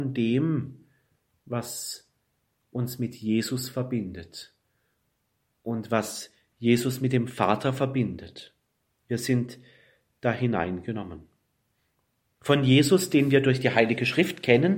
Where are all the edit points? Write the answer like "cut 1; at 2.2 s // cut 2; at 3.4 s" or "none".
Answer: none